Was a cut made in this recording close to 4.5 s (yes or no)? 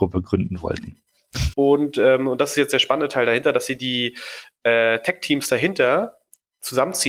no